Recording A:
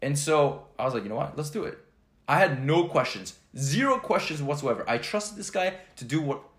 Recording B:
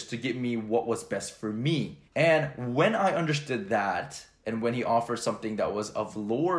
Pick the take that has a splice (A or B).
B